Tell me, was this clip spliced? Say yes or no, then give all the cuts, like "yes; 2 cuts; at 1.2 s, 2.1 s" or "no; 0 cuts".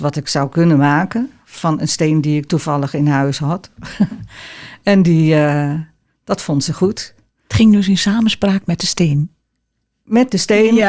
no; 0 cuts